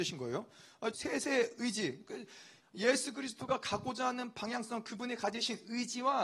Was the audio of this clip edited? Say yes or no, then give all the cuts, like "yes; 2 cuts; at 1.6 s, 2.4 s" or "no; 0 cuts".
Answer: yes; 2 cuts; at 0.9 s, 2.6 s